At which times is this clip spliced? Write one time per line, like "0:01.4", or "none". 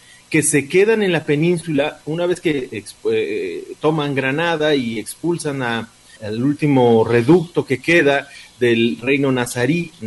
0:06.2